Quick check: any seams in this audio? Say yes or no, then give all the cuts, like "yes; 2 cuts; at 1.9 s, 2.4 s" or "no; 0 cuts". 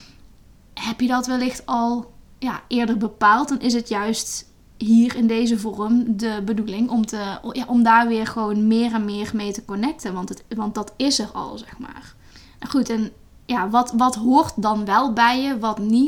no; 0 cuts